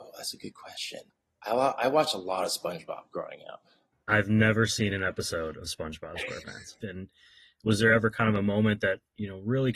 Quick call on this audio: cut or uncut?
cut